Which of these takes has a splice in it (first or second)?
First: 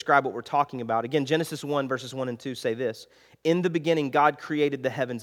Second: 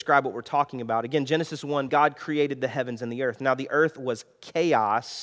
second